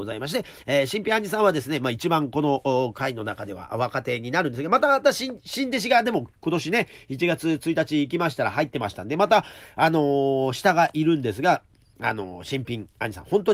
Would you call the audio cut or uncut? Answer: uncut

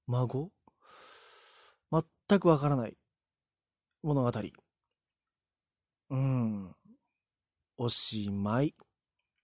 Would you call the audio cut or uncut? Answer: cut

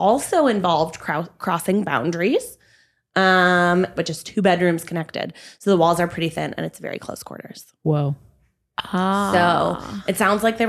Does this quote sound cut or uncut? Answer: cut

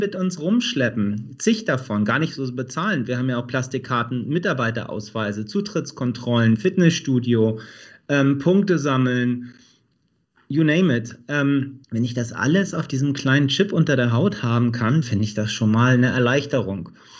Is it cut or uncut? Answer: cut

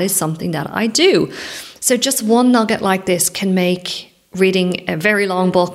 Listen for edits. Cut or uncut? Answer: uncut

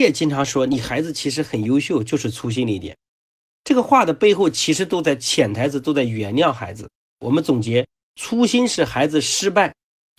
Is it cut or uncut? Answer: uncut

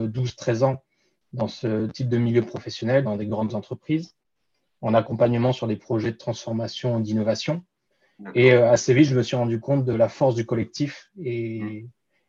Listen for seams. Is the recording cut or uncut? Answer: cut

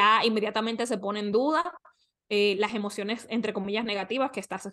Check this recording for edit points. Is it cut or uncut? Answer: uncut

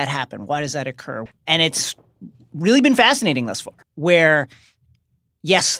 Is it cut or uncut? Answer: cut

